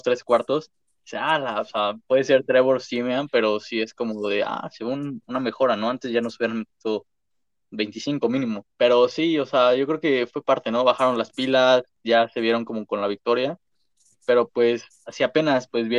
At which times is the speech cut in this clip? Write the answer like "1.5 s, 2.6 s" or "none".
8.7 s

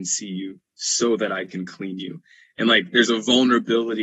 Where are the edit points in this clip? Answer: none

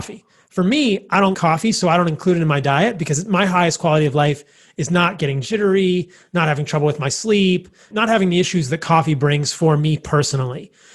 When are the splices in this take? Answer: 1.3 s, 7.9 s

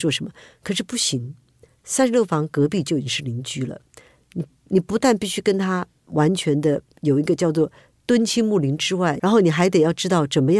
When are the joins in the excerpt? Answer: 9.2 s

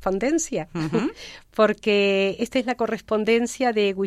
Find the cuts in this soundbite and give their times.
none

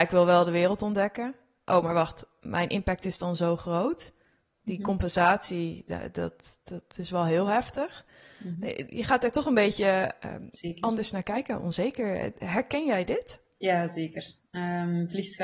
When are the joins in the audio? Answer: none

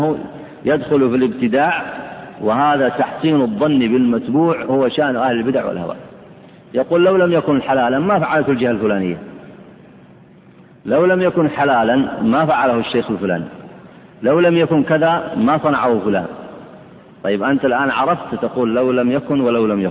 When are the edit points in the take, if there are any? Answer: none

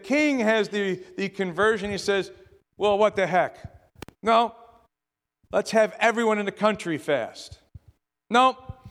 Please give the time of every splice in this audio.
4.1 s

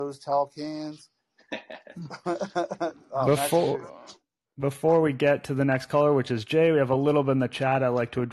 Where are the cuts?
none

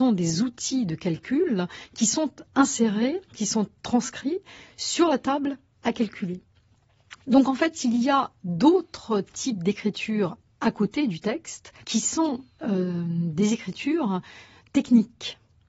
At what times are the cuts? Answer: 11.8 s

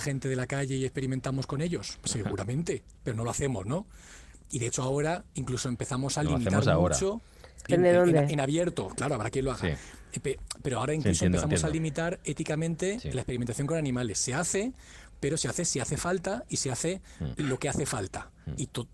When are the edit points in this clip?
7.7 s

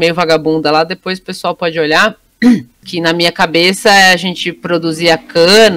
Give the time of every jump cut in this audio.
2.8 s

